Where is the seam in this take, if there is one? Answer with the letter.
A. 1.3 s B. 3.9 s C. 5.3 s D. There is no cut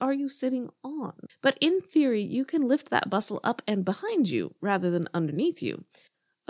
A